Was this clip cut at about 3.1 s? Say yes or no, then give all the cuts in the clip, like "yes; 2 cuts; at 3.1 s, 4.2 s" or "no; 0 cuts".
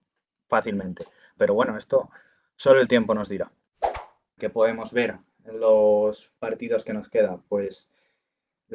no; 3 cuts; at 1.4 s, 4.4 s, 6.4 s